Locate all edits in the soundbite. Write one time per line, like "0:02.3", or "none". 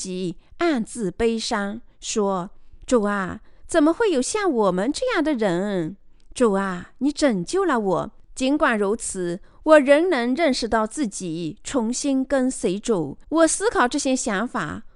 0:08.2
0:13.2